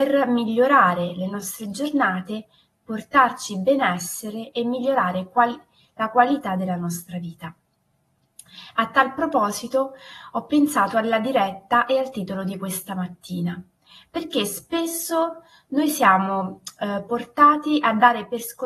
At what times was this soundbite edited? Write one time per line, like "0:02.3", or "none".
none